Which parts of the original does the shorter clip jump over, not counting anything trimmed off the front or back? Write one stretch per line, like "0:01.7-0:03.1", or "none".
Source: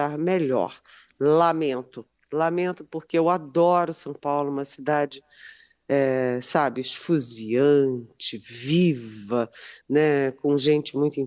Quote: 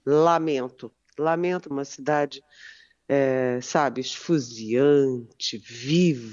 0:02.8-0:04.5